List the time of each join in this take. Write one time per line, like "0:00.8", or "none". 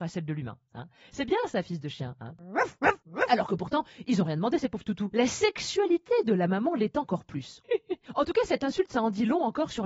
0:05.1
0:07.6